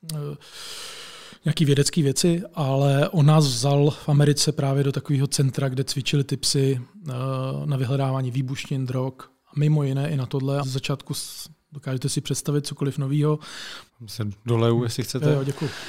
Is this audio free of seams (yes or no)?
no